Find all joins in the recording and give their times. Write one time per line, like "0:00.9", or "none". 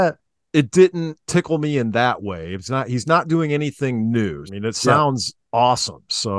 0:01.2
0:04.5